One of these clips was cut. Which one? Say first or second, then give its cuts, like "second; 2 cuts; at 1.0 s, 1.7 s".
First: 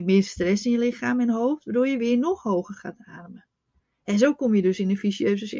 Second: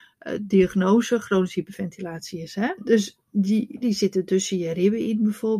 second; 2 cuts; at 2.8 s, 3.8 s